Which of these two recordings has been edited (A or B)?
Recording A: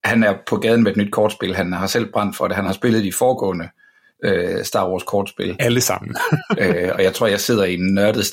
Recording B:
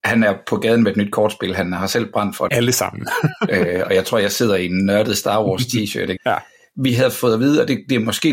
B